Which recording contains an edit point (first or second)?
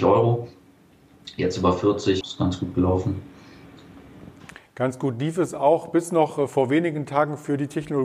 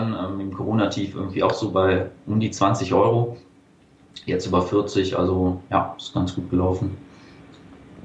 first